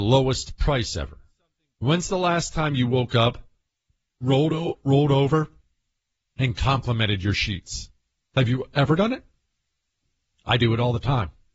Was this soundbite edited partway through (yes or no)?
no